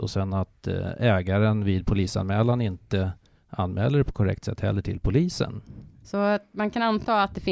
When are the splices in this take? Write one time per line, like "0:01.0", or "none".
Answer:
0:06.0